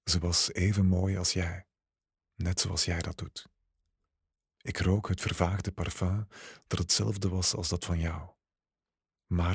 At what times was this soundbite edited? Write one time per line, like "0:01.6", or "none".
0:02.2
0:04.6